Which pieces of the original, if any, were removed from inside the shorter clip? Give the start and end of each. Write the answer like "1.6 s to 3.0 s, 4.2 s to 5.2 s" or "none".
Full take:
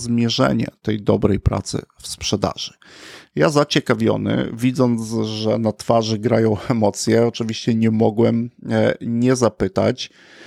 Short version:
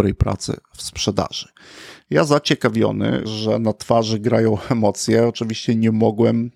4.5 s to 5.2 s